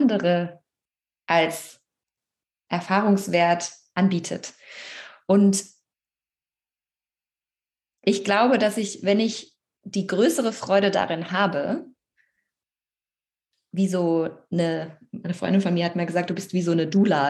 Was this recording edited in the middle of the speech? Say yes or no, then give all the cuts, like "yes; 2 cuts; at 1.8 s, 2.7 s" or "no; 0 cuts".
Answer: no; 0 cuts